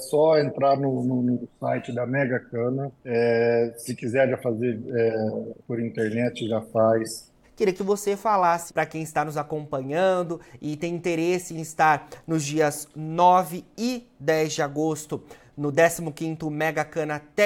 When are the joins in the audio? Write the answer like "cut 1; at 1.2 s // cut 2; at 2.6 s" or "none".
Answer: cut 1; at 3.0 s // cut 2; at 7.4 s // cut 3; at 8.7 s